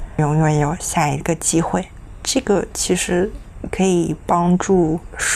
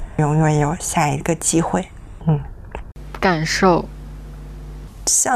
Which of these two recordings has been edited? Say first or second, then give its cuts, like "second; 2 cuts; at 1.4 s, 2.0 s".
second; 2 cuts; at 2.2 s, 3.2 s